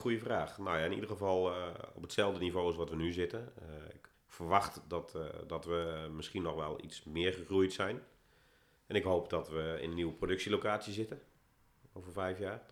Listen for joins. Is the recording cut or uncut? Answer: cut